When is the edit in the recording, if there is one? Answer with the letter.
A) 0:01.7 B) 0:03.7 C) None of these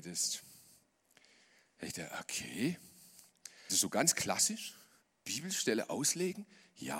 B